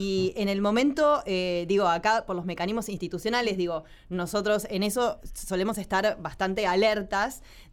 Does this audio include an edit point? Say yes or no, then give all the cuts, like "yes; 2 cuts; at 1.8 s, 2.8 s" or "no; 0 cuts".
no; 0 cuts